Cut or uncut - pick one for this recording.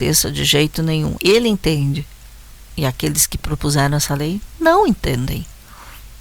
cut